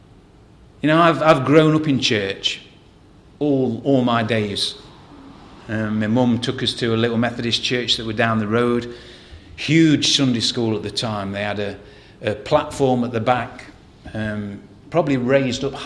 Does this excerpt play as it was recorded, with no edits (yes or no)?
yes